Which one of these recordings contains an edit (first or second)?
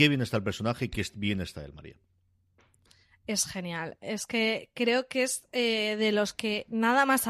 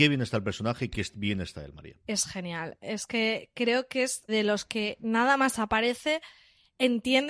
second